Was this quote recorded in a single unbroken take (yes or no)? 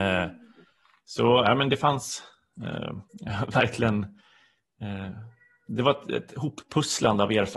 no